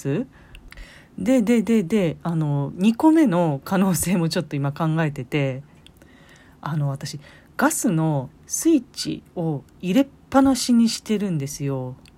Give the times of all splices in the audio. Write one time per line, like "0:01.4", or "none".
none